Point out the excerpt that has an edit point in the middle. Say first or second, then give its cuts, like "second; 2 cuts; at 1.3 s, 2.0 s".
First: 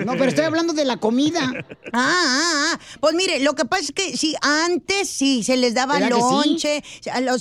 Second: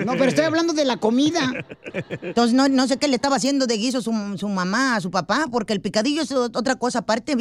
second; 1 cut; at 1.9 s